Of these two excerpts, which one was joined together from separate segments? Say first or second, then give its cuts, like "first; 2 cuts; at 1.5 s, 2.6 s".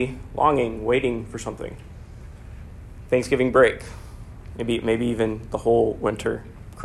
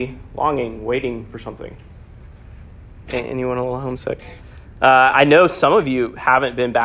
second; 1 cut; at 3.0 s